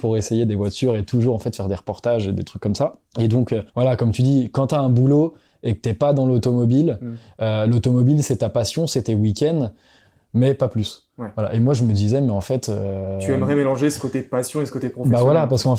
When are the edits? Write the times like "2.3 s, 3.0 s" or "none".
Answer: 3.7 s